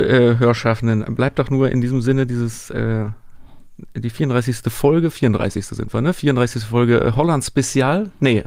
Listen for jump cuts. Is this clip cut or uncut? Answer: cut